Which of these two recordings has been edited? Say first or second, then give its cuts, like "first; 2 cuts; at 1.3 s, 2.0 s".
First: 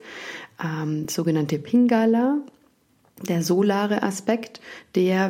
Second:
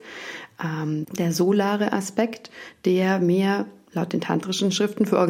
second; 1 cut; at 1.0 s